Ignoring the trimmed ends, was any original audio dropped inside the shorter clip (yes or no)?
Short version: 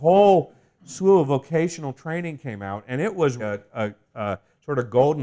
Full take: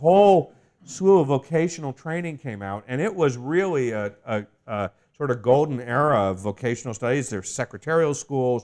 yes